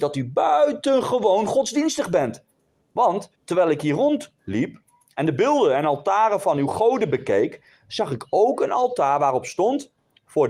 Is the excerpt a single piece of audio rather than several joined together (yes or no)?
no